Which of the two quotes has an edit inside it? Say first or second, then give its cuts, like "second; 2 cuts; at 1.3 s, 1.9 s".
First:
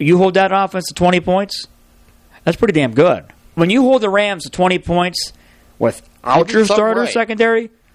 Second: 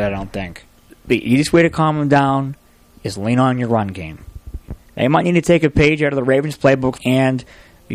second; 2 cuts; at 4.8 s, 7.0 s